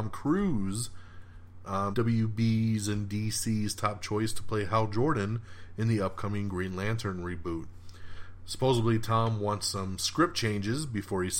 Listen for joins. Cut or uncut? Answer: cut